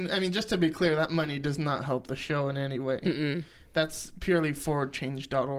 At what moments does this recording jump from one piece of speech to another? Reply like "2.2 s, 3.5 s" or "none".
none